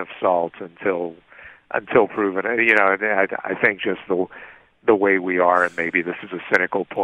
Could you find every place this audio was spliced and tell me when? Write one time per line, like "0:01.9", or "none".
none